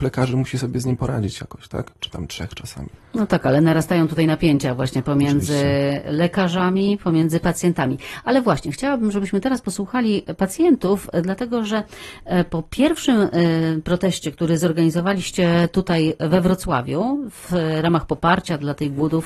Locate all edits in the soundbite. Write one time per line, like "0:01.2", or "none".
none